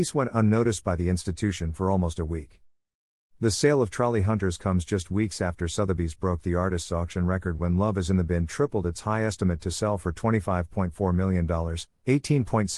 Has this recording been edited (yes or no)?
no